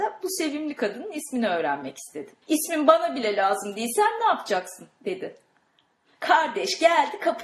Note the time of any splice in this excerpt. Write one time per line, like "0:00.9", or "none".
0:02.4
0:06.1